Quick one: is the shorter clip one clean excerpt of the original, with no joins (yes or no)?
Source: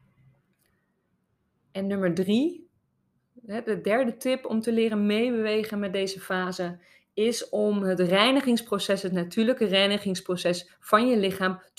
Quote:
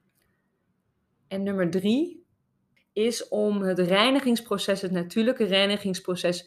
no